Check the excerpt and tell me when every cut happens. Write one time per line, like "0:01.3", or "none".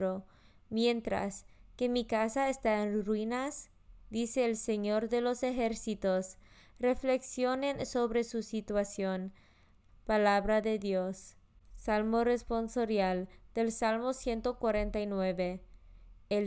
0:04.0
0:09.9